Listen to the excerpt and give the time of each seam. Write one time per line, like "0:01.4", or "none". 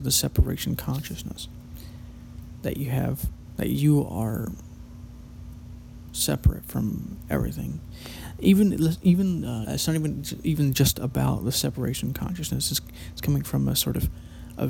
0:09.6